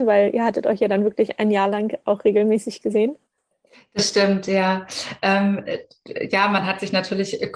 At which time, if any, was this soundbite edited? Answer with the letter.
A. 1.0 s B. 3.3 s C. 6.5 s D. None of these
D